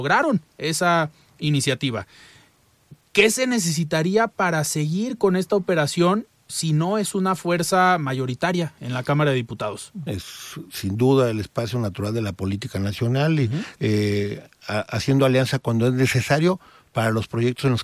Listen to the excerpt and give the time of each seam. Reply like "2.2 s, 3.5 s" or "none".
10.1 s, 13.8 s